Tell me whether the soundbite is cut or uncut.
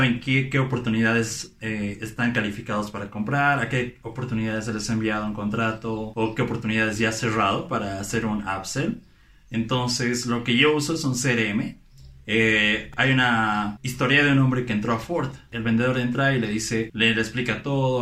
cut